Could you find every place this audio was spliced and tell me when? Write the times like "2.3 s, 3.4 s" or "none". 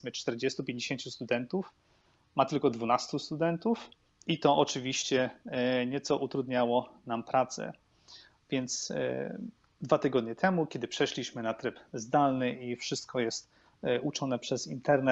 none

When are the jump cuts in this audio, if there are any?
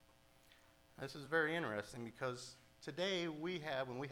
none

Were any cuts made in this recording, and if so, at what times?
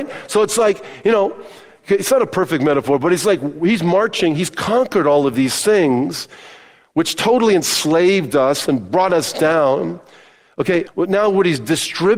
10.9 s

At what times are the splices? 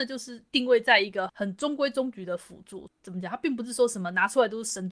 1.3 s, 2.9 s

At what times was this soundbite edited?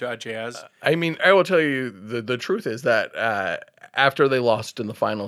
1.2 s

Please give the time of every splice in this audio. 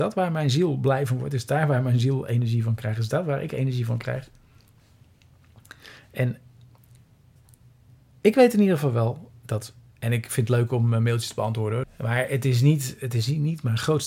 11.8 s

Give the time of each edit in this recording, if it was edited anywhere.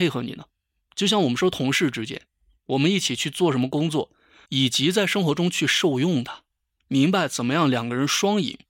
4.4 s, 6.7 s

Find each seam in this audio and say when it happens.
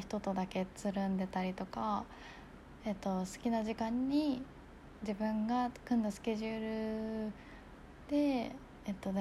none

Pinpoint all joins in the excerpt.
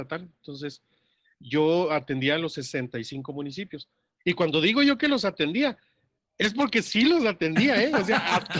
none

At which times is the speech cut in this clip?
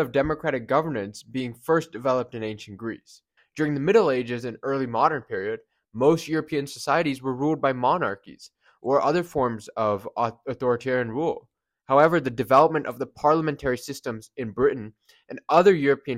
3.4 s

